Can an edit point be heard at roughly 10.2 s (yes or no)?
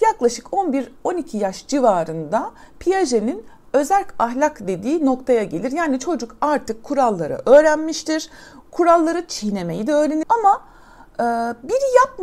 yes